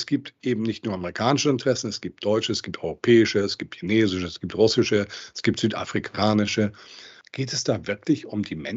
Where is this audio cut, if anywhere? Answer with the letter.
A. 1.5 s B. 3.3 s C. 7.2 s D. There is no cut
C